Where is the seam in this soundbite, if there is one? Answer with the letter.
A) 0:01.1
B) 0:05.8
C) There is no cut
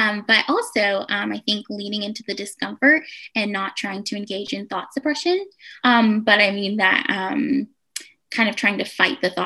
B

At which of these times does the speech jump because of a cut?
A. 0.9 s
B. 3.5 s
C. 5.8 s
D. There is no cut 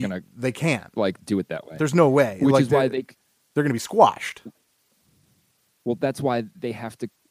D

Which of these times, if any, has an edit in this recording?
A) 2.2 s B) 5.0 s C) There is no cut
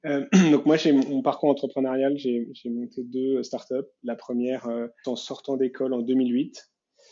B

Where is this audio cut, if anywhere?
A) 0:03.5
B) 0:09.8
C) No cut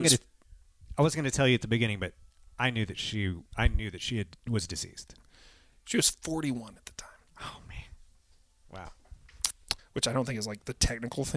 B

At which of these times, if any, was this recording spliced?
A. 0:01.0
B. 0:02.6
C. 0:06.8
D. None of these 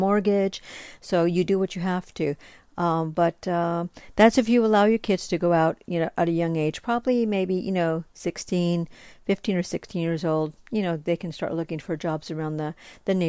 A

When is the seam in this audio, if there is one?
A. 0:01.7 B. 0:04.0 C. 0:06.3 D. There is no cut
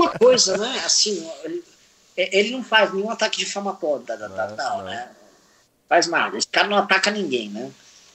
B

